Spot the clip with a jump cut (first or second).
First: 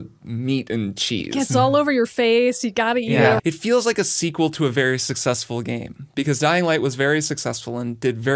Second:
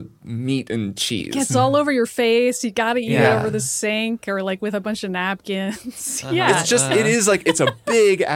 first